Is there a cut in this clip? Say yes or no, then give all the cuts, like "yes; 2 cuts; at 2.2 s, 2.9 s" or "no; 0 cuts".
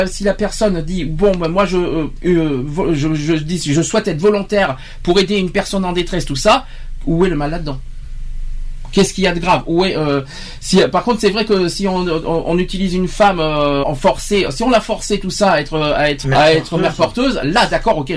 yes; 2 cuts; at 13.8 s, 16.2 s